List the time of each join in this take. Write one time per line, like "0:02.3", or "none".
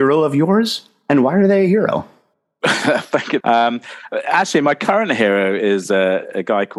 0:03.4